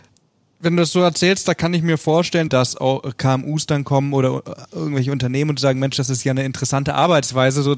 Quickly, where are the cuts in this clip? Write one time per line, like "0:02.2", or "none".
0:02.5